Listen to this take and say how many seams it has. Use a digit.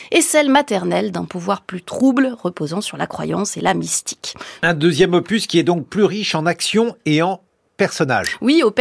1